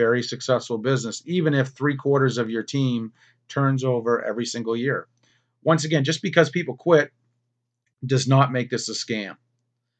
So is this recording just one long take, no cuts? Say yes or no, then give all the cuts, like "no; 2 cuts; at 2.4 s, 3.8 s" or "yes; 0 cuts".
yes; 0 cuts